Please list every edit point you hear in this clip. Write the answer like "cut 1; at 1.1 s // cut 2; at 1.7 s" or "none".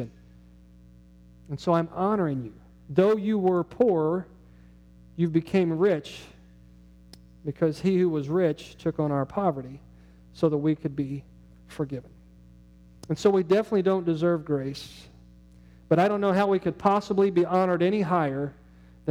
none